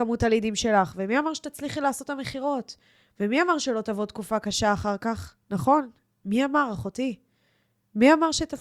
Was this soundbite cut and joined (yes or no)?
no